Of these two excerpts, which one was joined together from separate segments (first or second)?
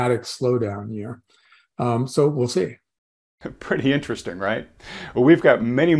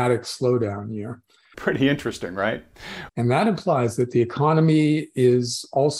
second